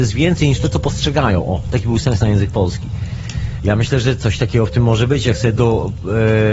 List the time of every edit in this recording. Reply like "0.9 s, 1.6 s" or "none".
3.6 s